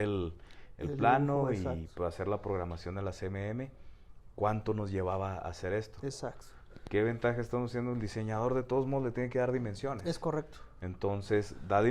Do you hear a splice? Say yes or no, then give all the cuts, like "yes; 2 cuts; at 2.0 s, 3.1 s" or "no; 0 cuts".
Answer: no; 0 cuts